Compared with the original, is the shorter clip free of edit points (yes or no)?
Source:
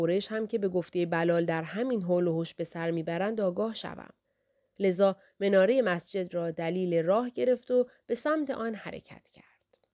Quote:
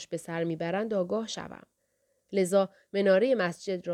yes